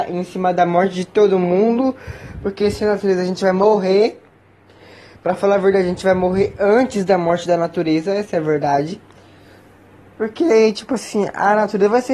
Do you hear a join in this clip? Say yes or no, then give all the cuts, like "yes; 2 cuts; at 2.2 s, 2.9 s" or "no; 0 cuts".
no; 0 cuts